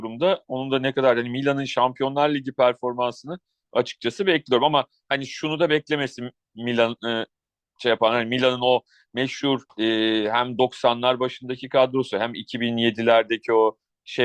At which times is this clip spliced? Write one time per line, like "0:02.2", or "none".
0:09.7